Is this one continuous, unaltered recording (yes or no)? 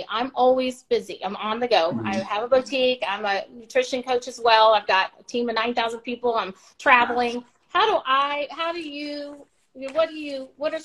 yes